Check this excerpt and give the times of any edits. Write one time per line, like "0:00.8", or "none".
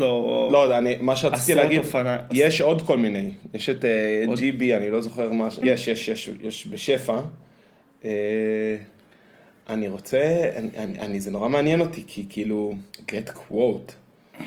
0:05.6
0:12.9